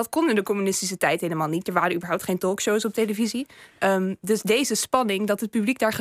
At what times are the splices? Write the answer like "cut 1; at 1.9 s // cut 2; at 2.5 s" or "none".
none